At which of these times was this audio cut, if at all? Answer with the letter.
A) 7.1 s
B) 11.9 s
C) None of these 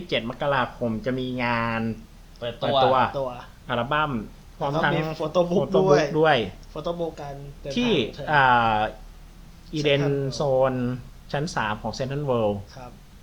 A